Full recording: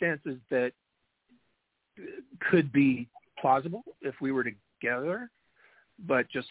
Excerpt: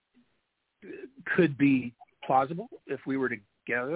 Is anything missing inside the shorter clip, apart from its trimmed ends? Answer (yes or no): no